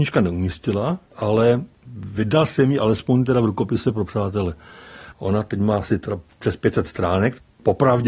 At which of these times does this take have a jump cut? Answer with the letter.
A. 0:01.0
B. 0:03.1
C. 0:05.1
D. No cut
C